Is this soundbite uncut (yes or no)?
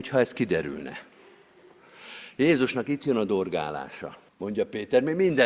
no